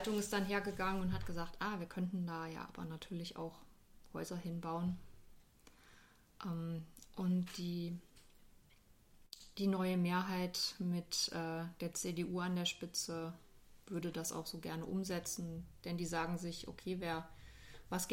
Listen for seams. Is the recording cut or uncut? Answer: uncut